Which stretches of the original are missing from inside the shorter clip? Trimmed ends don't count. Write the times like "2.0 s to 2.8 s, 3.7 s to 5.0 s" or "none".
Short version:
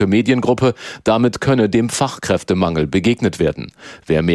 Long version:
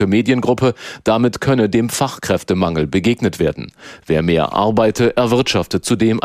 none

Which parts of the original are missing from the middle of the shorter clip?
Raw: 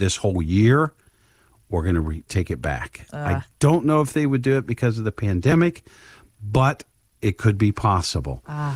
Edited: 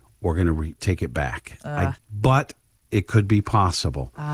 3.5 s to 6.3 s

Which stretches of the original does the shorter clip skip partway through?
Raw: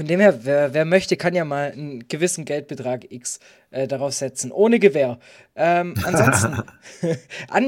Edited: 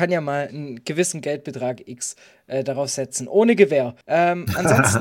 5.2 s to 5.5 s

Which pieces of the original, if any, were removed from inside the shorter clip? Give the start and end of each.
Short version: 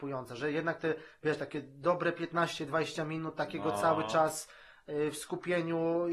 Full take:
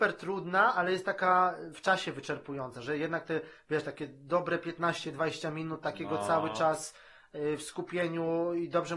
none

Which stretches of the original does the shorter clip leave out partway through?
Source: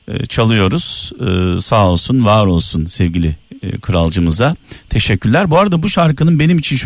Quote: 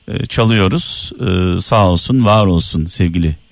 none

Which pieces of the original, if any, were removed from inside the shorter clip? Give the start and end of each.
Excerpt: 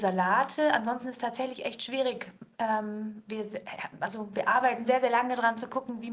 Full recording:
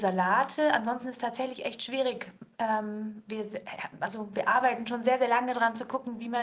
4.8 s to 5.0 s

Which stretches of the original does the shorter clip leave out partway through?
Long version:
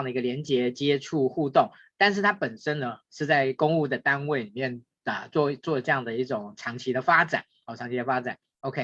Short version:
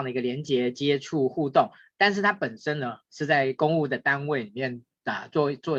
none

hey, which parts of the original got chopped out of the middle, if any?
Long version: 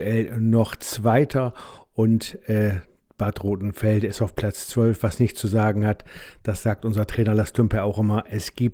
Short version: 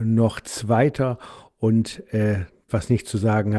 3.0 s to 5.0 s

